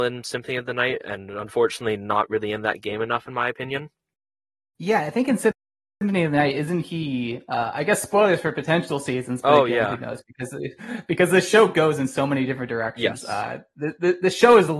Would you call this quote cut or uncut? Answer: uncut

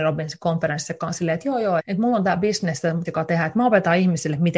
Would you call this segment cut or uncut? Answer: cut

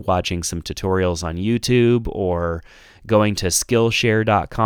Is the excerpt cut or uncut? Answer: uncut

